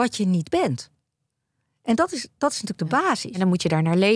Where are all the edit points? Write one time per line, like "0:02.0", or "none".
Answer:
none